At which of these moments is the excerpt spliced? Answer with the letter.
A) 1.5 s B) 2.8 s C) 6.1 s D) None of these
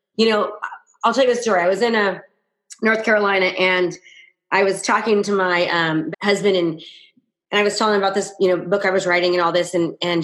C